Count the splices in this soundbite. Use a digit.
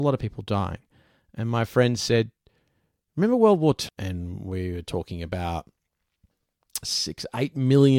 2